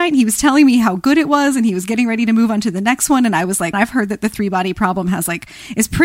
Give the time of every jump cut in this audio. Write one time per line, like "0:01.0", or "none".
0:03.7

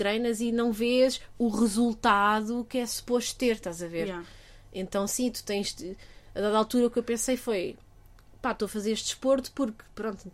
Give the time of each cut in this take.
none

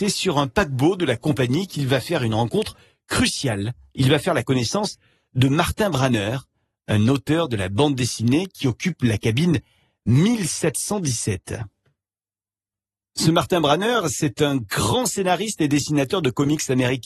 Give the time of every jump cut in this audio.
none

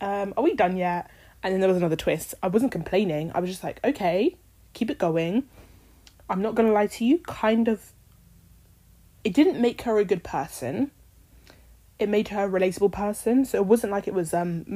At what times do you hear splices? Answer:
none

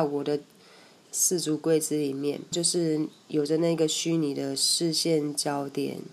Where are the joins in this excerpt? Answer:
0:01.0
0:02.5

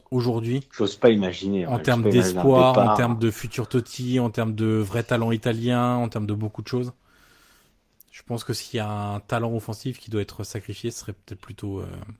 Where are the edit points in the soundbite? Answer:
none

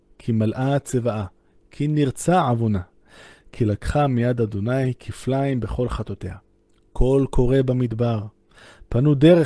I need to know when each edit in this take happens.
none

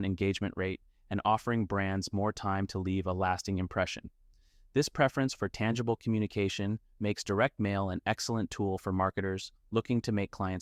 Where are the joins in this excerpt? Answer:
none

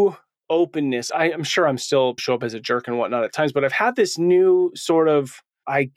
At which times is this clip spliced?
none

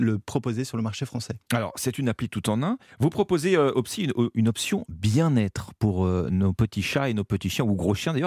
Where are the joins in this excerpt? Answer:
0:02.9

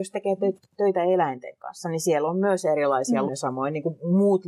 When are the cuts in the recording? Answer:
0:03.3

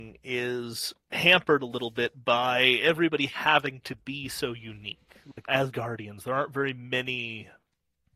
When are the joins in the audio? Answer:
0:05.5

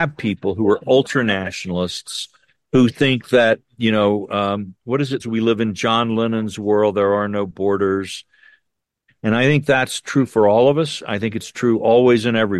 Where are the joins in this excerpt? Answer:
0:05.2
0:09.1

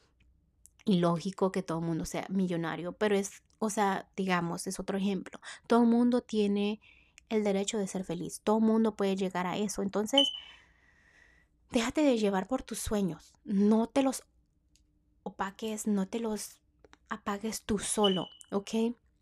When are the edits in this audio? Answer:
0:04.1

